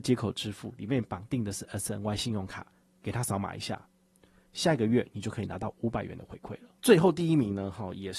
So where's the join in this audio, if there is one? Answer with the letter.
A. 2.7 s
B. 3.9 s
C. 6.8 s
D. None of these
C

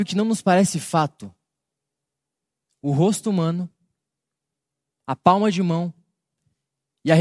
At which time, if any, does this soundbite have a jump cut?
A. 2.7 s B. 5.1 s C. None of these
A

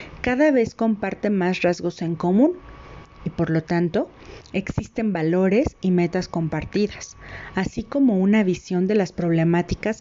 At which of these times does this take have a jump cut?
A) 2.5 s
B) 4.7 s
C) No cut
C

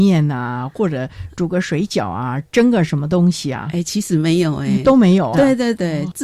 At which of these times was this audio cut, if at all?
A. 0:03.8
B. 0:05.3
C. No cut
B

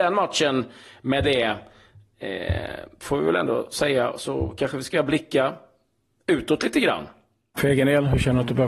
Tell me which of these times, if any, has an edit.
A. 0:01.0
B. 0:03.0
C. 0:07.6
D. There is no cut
C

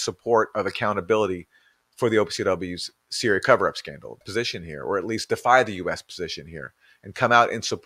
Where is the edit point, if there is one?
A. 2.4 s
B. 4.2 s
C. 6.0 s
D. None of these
B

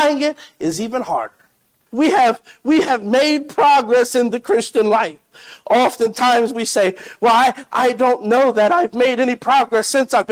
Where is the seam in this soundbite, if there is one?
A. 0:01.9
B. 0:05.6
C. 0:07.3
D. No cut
A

